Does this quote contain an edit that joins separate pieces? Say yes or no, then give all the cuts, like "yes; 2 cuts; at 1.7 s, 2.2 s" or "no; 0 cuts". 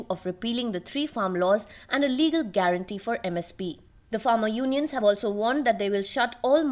no; 0 cuts